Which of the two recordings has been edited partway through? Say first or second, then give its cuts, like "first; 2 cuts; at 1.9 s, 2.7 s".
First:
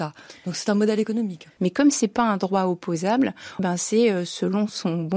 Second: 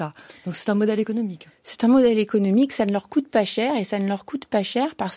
first; 2 cuts; at 1.6 s, 3.6 s